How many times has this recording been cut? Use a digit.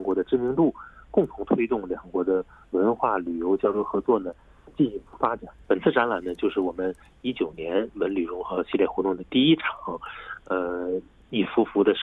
1